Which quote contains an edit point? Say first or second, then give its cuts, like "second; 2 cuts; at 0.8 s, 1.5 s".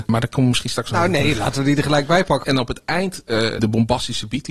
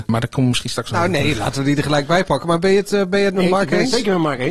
first; 2 cuts; at 2.4 s, 3.6 s